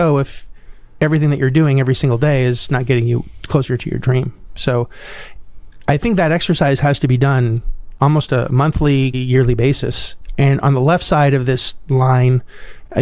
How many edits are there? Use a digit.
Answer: 2